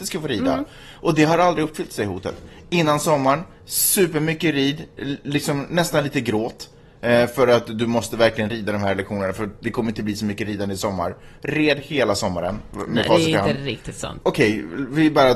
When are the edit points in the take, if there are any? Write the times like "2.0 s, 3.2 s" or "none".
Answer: 14.2 s